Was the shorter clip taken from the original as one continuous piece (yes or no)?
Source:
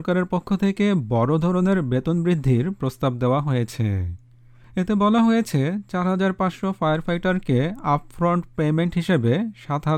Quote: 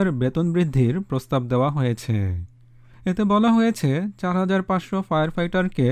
yes